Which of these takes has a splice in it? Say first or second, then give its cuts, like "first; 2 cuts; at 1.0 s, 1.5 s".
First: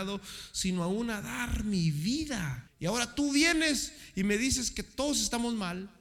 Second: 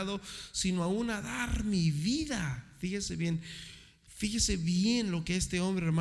first; 1 cut; at 2.7 s